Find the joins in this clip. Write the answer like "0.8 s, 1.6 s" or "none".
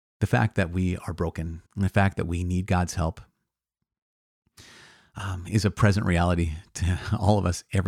1.7 s